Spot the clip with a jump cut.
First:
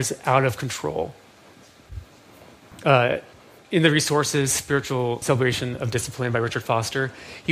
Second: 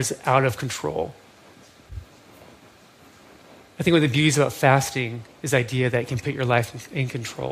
first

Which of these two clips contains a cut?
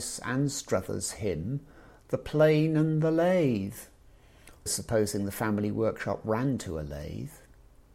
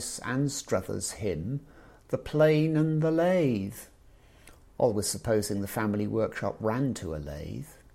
first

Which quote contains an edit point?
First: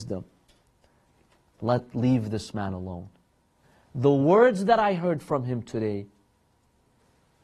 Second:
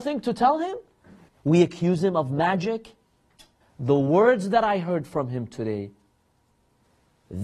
second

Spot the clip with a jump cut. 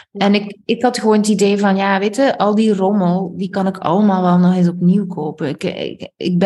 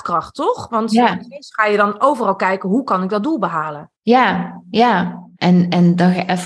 second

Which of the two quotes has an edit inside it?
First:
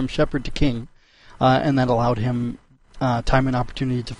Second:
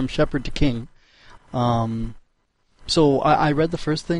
second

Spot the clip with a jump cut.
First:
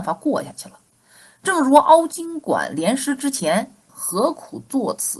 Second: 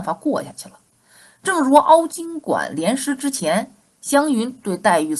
first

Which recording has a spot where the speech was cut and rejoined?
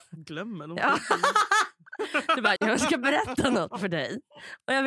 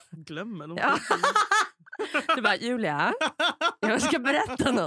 first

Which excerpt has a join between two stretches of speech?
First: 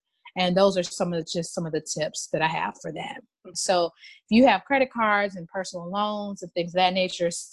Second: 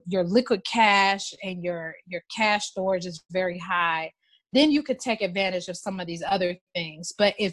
first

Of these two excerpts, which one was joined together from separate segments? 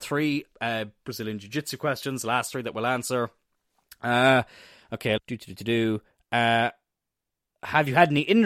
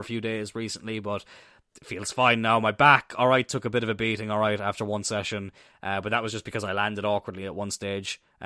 first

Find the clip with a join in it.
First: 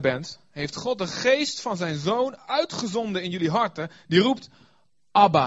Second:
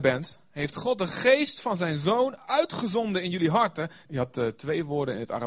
second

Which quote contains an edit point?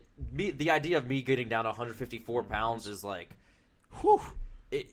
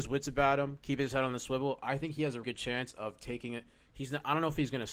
second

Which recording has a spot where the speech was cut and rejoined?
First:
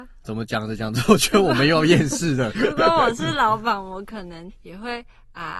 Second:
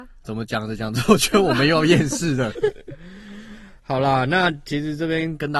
second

